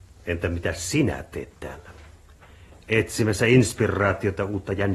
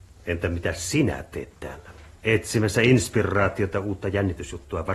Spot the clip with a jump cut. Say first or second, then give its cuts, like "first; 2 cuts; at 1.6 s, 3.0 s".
second; 1 cut; at 2.2 s